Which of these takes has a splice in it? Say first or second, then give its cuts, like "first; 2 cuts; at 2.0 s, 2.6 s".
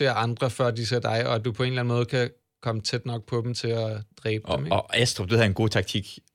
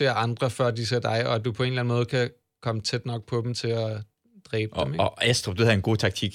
first; 1 cut; at 4.1 s